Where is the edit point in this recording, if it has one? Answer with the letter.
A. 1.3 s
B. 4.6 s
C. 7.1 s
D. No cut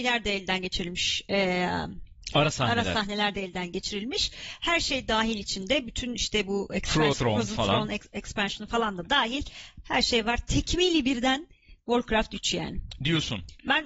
C